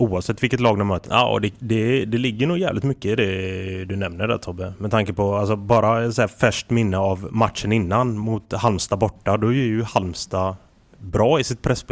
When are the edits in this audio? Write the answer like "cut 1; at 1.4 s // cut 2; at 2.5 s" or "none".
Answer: cut 1; at 1.0 s

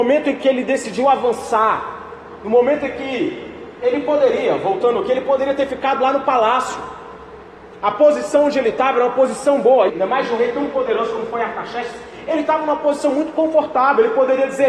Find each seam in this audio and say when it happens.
cut 1; at 9.9 s

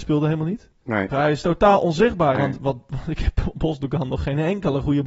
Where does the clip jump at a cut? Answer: cut 1; at 1.1 s // cut 2; at 2.4 s

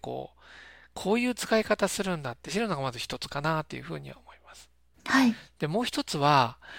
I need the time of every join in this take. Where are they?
none

